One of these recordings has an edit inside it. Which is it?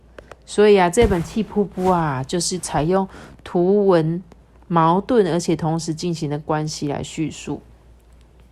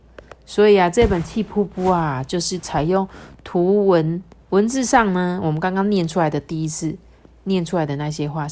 second; 1 cut; at 4.5 s

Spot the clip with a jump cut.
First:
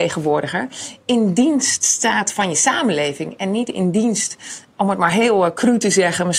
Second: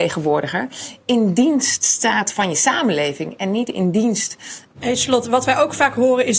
second; 1 cut; at 4.6 s

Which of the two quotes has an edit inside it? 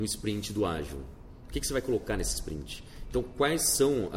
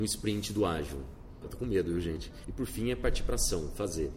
second; 2 cuts; at 1.4 s, 2.4 s

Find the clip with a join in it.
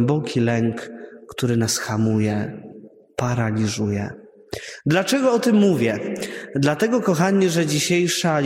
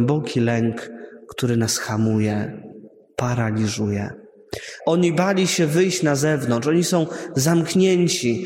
second; 1 cut; at 4.8 s

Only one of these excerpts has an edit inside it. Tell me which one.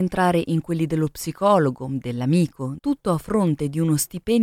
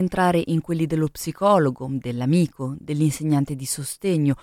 first; 1 cut; at 2.8 s

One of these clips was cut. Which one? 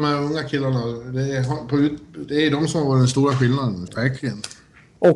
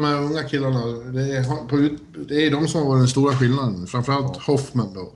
first; 1 cut; at 3.9 s

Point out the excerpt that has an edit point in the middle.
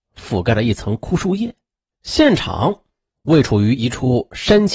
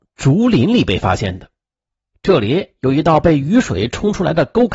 first; 1 cut; at 1.9 s

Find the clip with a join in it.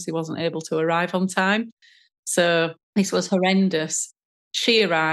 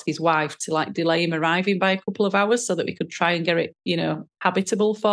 first; 1 cut; at 2.8 s

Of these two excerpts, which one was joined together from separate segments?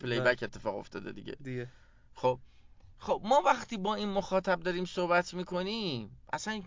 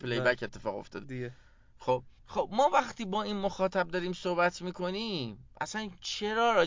second; 2 cuts; at 1.0 s, 2.2 s

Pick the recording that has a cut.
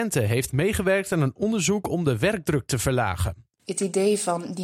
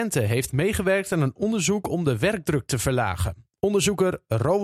first; 1 cut; at 3.6 s

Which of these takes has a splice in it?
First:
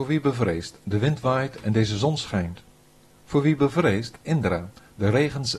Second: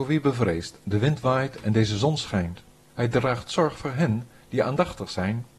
second; 1 cut; at 2.9 s

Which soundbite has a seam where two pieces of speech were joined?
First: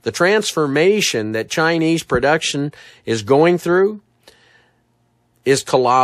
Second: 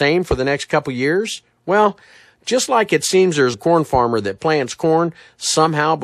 second; 1 cut; at 3.5 s

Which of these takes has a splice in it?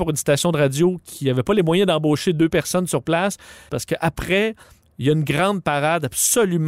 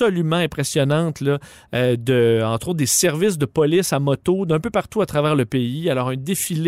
first; 1 cut; at 3.7 s

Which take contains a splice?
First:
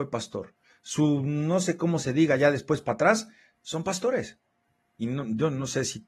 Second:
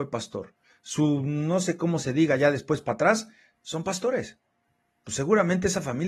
first; 1 cut; at 4.9 s

